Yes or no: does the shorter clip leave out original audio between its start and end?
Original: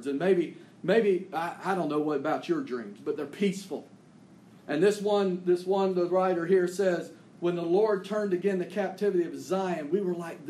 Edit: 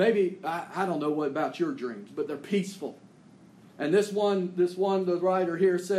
no